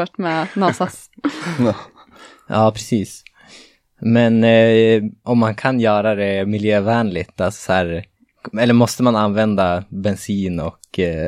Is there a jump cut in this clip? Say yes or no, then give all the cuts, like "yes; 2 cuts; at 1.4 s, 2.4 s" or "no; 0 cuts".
yes; 1 cut; at 5.2 s